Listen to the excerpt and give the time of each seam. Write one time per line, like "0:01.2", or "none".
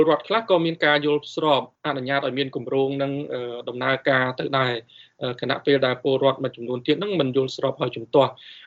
0:01.8